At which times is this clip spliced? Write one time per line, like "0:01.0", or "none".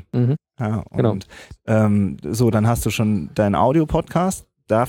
0:01.6